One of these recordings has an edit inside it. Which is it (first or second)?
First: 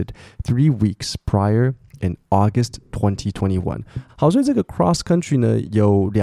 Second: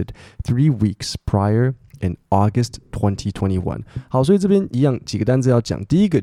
first